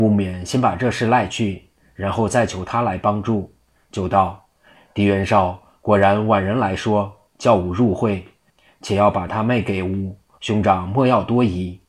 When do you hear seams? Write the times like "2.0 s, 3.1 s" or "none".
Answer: 4.7 s, 10.3 s